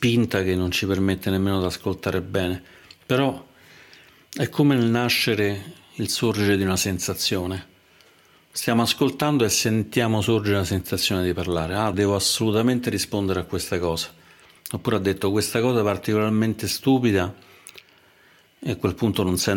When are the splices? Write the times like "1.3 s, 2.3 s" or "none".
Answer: 11.9 s, 14.6 s